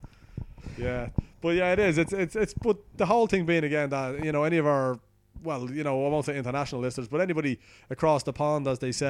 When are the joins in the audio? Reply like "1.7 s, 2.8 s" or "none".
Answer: none